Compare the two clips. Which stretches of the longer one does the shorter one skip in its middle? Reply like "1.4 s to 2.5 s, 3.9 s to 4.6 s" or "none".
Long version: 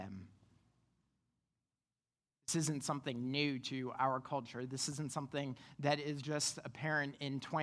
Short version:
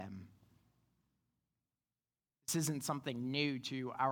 none